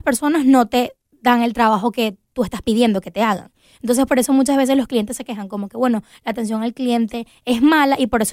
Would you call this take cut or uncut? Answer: uncut